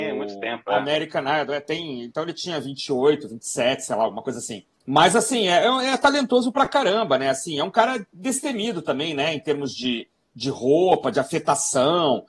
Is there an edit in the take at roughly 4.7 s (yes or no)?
yes